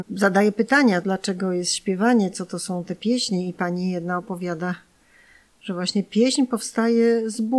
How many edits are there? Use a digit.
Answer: 0